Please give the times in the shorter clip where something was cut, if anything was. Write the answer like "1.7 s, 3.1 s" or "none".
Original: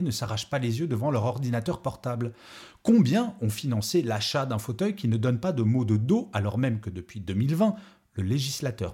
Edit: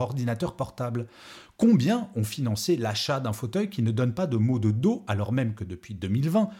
none

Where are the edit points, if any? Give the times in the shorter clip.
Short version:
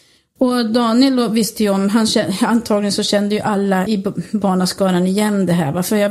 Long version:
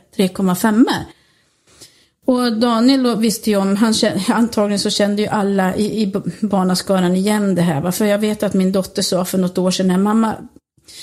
3.9 s

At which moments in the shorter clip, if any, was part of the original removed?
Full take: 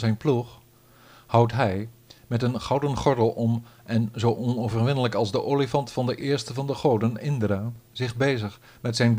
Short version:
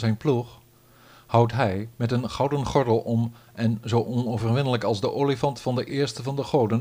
1.9 s

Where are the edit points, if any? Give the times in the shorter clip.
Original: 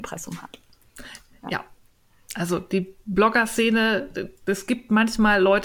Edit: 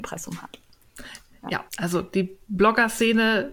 1.7 s

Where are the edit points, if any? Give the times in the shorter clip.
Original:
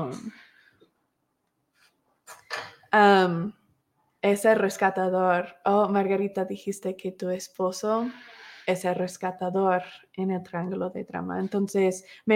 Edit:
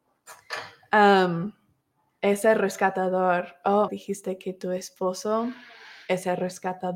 3.9 s

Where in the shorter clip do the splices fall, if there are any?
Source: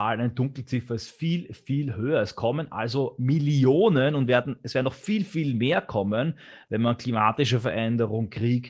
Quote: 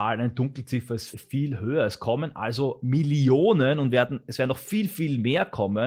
1.1 s

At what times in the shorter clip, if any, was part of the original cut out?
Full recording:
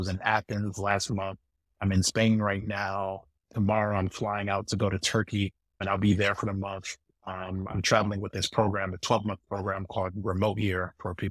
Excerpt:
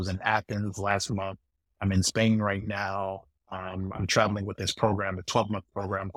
3.4 s

